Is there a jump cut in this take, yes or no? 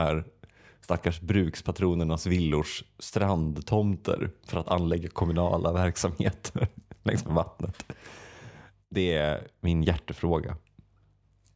no